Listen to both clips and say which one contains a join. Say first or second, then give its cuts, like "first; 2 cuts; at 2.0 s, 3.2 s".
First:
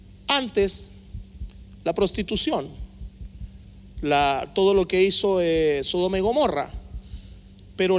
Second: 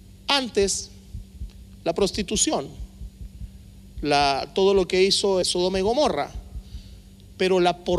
second; 1 cut; at 5.4 s